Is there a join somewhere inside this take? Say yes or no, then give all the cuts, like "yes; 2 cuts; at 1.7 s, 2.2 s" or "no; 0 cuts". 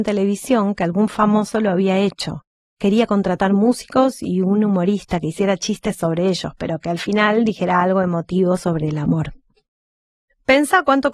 no; 0 cuts